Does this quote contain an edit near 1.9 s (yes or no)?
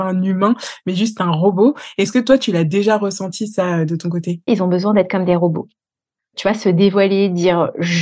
no